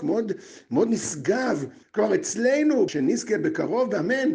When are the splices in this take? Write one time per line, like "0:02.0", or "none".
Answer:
0:01.8
0:02.9